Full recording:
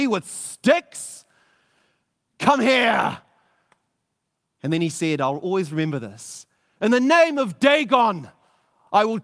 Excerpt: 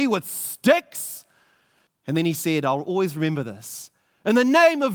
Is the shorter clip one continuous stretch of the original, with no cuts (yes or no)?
no